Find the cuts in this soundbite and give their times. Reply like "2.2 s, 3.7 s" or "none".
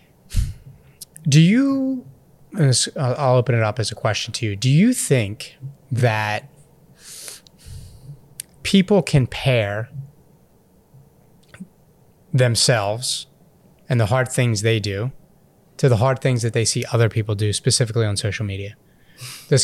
none